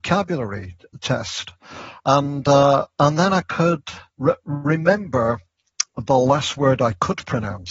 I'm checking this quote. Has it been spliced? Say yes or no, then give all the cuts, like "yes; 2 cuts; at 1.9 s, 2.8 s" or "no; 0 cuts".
yes; 2 cuts; at 2.0 s, 4.1 s